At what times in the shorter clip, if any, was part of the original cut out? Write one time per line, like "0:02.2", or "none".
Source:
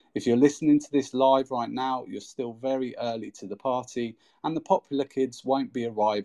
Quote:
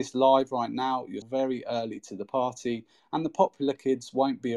0:01.2